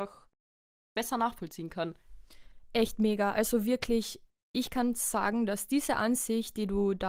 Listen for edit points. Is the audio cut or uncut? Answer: uncut